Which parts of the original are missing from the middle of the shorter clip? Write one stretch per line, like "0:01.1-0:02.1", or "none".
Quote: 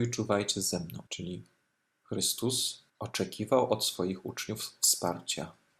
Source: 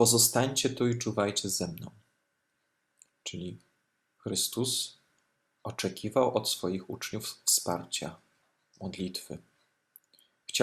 0:01.9-0:03.2
0:05.0-0:05.5